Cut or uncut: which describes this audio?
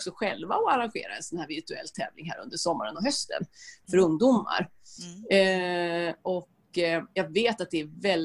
uncut